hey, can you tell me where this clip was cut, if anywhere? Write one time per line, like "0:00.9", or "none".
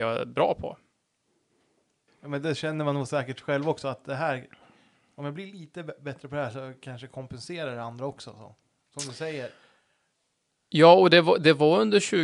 0:02.1